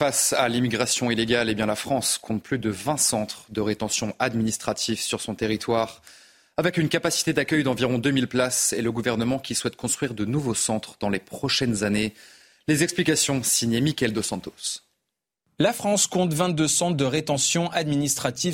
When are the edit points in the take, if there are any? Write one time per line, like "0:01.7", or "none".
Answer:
none